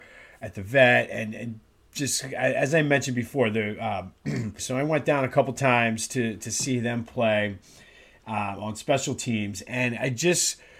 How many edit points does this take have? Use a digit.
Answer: 1